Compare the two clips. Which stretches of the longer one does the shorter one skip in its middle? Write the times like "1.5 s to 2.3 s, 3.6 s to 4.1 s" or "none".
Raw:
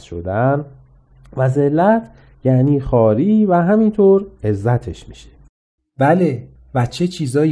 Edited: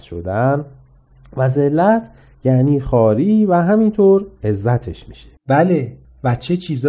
5.4 s to 5.9 s